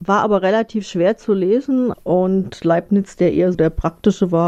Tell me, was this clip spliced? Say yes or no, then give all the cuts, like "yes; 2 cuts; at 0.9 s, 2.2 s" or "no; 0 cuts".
yes; 2 cuts; at 1.9 s, 3.5 s